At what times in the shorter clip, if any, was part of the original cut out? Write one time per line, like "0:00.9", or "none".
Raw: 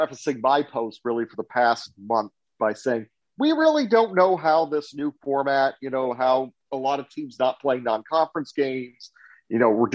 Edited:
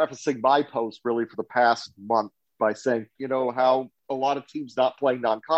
0:03.1